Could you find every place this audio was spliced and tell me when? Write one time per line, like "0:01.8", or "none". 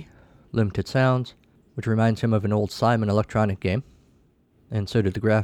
none

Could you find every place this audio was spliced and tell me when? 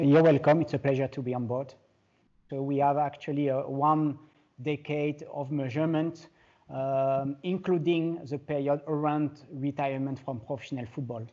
0:02.5

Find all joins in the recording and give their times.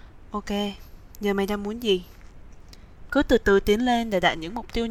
0:03.1

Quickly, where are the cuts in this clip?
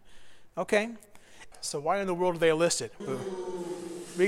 0:01.5
0:03.0

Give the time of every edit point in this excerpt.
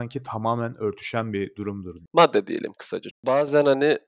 0:02.1
0:03.1

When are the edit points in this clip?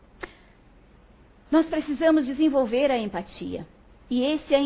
none

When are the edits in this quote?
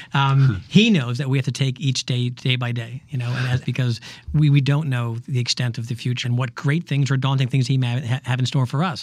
0:03.6
0:06.2

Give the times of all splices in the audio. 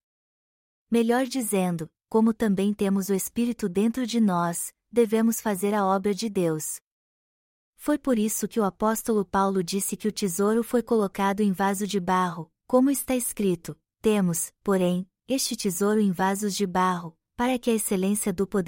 0:02.0

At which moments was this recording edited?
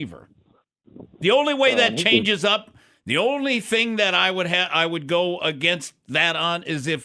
none

